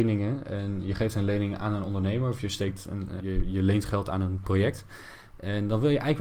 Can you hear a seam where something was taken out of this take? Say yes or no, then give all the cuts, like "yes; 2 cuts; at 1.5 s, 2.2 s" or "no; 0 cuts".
yes; 1 cut; at 3.2 s